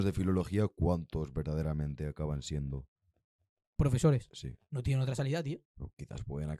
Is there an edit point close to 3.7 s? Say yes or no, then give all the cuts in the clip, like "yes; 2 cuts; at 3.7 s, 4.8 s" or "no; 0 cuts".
no; 1 cut; at 5.7 s